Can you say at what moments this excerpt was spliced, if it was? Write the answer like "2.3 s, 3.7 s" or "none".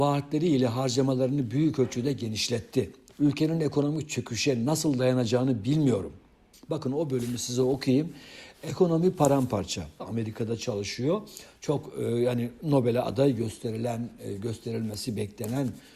6.5 s, 10.0 s